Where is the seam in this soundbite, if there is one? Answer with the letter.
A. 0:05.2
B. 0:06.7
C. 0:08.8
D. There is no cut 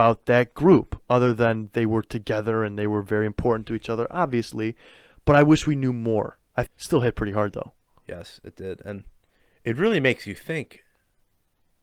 B